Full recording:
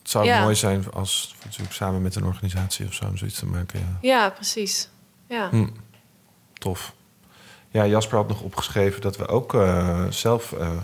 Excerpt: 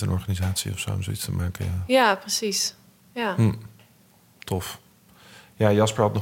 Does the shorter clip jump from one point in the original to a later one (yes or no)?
no